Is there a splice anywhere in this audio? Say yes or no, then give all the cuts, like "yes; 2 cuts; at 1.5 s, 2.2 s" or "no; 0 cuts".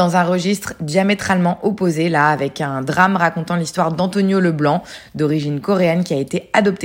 no; 0 cuts